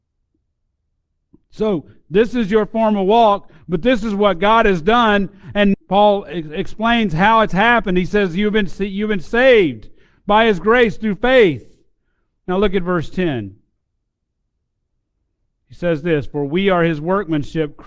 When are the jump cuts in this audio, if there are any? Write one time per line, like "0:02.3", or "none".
0:05.7

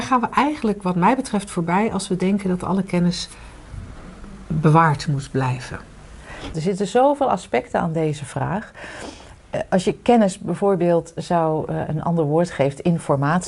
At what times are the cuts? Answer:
0:06.5

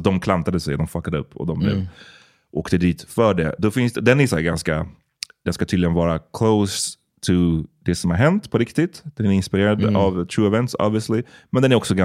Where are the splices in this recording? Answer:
none

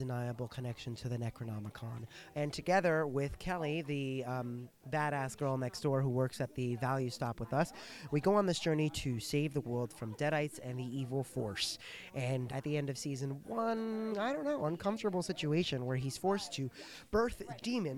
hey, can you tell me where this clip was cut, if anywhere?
0:02.3
0:12.5
0:14.1

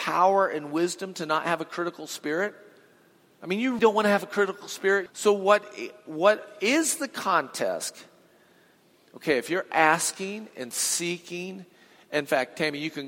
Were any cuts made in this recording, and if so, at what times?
0:03.8
0:05.1

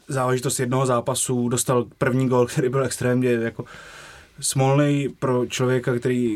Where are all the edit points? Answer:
none

